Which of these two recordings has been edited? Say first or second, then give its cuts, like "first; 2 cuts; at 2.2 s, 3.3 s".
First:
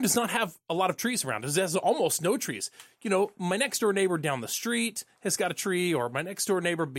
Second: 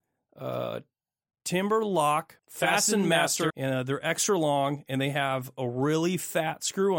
second; 2 cuts; at 2.4 s, 3.5 s